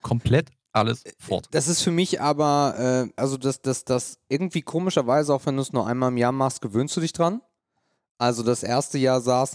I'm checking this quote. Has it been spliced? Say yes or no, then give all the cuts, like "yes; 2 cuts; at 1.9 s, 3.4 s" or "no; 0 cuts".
no; 0 cuts